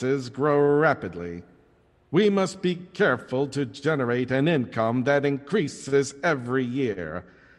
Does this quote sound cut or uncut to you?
uncut